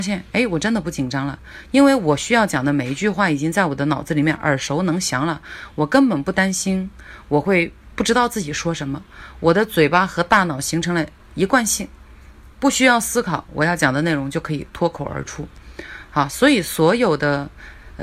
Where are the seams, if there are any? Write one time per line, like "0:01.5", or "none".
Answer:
none